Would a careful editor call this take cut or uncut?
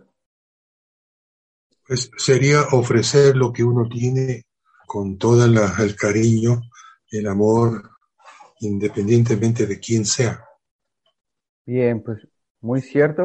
cut